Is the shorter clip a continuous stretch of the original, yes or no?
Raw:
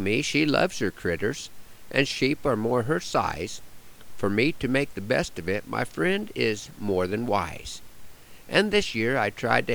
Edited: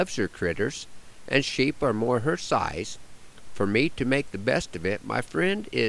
yes